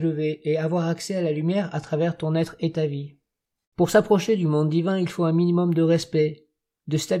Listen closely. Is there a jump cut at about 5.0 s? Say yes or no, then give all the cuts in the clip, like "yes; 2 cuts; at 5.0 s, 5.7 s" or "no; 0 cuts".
no; 1 cut; at 3.6 s